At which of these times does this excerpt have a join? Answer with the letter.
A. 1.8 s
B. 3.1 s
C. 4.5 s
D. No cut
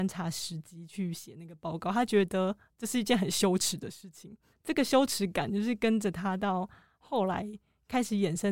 C